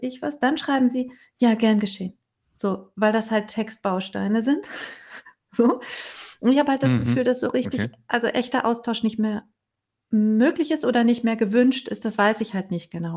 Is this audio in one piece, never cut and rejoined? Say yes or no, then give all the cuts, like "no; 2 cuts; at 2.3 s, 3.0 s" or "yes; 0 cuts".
yes; 0 cuts